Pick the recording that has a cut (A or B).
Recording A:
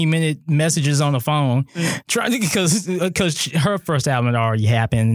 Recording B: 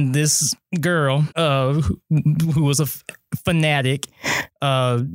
B